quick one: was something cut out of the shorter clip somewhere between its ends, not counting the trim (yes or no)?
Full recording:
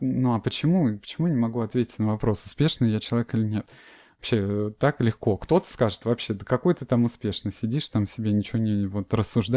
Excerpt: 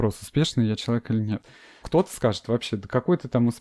yes